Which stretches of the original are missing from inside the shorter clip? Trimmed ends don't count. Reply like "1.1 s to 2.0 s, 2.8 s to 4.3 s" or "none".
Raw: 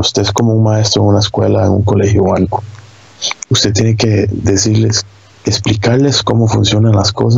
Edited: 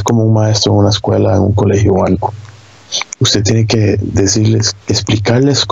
5.1 s to 5.4 s

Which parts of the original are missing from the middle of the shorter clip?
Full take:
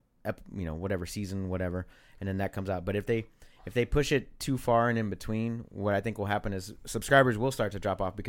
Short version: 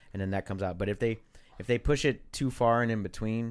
none

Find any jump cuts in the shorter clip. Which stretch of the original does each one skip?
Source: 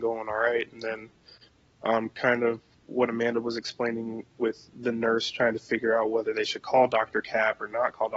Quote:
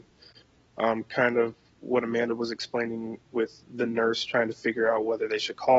none

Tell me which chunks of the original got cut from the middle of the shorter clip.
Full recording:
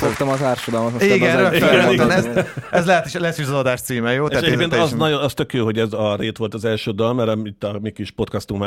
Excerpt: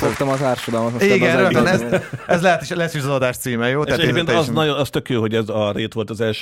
1.5 s to 1.9 s

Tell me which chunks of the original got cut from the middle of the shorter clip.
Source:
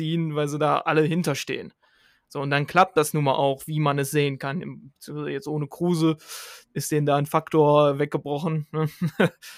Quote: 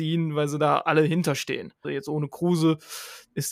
1.8 s to 5.2 s

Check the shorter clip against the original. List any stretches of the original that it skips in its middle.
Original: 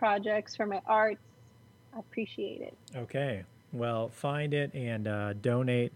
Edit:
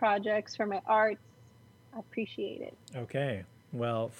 none

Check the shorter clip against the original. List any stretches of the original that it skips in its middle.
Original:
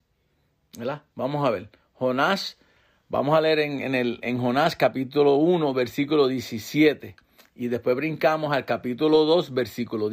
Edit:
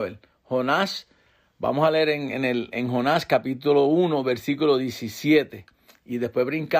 none

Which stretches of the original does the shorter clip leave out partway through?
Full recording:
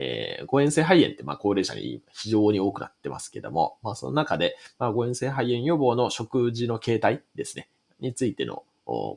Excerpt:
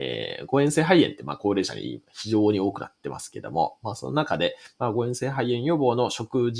none

